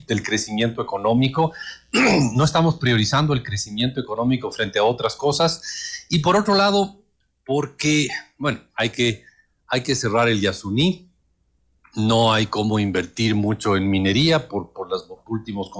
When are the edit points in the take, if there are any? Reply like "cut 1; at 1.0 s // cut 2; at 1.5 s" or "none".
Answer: none